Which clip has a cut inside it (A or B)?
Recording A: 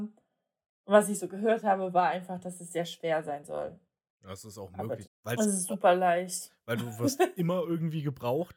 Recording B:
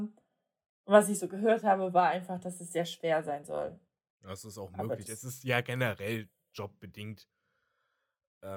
A